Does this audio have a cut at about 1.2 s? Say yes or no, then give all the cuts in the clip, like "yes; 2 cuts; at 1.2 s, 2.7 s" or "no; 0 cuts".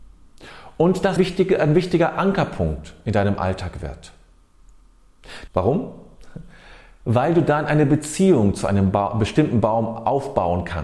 yes; 2 cuts; at 1.2 s, 5.5 s